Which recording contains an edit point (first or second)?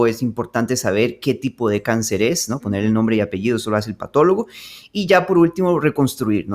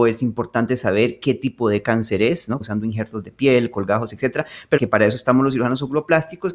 second